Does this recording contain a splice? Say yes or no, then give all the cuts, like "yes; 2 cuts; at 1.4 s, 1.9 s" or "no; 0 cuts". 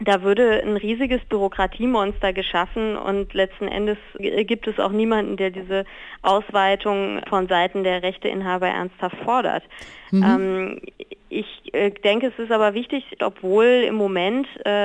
yes; 1 cut; at 13.2 s